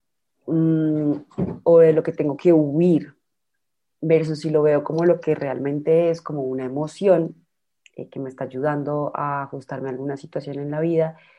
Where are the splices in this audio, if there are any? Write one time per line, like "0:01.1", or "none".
0:01.6